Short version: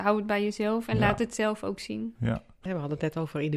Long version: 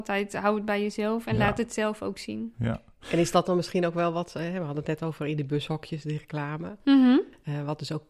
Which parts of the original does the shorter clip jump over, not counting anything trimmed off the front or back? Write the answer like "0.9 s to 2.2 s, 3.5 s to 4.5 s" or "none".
3.0 s to 4.5 s

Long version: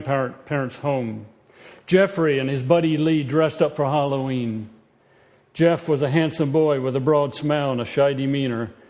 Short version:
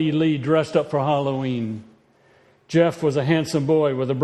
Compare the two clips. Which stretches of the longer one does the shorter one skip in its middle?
none

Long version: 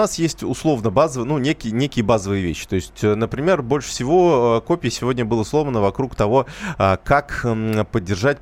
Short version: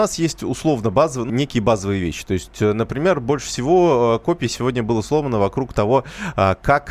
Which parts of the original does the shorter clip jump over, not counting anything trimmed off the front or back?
1.3 s to 1.7 s

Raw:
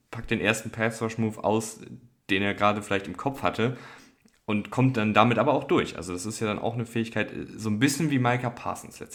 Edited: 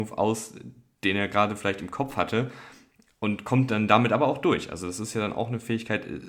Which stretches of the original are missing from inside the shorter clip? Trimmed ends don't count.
none

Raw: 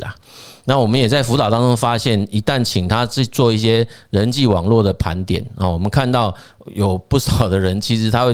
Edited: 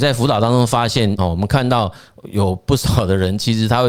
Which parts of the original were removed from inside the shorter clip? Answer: 2.3 s to 5.6 s

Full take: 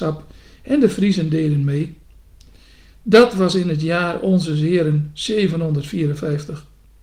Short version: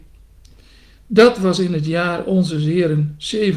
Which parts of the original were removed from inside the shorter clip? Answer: none

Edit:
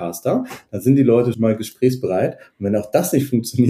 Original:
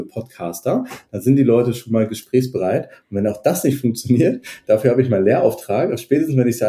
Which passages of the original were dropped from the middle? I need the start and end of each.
1.7 s to 1.9 s

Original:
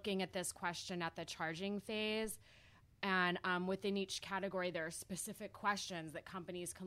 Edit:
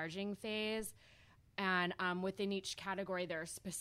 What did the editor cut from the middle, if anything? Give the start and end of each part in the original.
none

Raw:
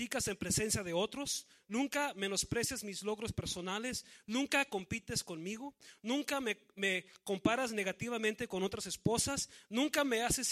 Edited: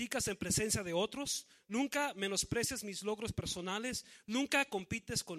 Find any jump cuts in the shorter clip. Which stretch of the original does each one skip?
none

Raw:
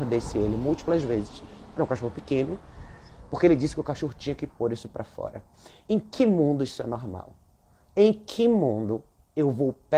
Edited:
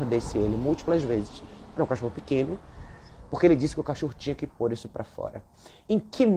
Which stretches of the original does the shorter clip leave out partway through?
none

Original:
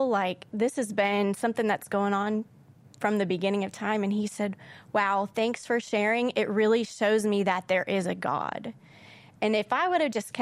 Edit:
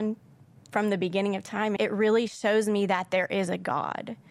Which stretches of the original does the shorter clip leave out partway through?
4.0 s to 6.3 s

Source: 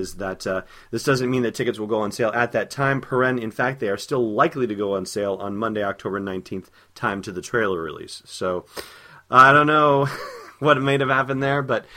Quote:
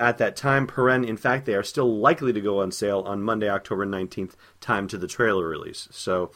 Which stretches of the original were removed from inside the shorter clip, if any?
none

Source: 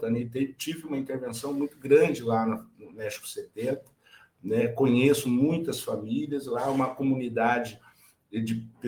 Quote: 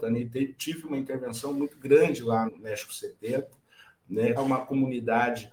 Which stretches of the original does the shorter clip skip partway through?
2.5 s to 2.8 s, 4.7 s to 6.6 s

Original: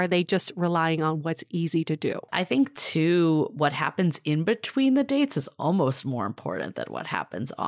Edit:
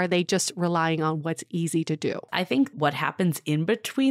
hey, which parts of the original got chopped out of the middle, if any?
2.7 s to 3.5 s

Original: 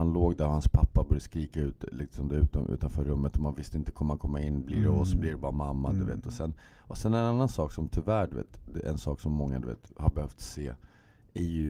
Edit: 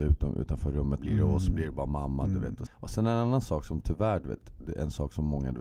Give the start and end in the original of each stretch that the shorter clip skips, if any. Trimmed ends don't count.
3.3 s to 4.6 s, 6.3 s to 6.7 s

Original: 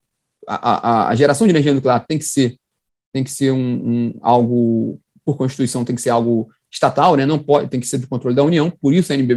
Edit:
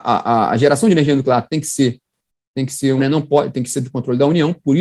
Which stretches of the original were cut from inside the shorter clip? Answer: 3.6 s to 7.1 s

